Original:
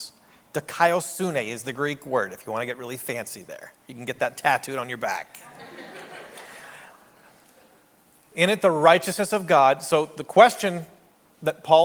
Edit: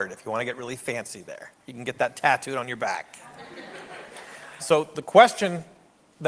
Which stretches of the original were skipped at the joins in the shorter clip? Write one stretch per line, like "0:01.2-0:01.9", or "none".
0:06.8-0:09.8